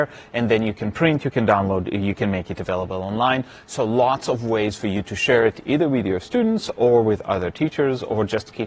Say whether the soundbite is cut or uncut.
uncut